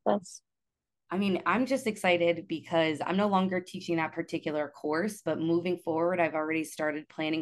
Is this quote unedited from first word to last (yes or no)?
yes